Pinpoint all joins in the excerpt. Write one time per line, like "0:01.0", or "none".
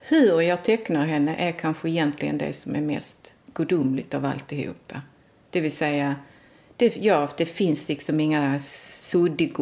0:03.4